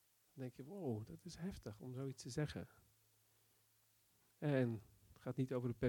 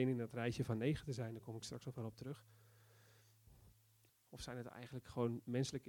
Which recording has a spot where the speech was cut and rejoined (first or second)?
second